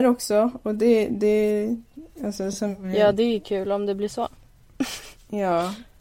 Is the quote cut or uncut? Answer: uncut